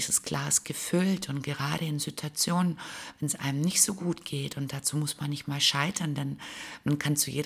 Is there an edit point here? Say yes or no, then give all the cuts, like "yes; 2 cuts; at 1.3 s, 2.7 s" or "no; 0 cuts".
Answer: no; 0 cuts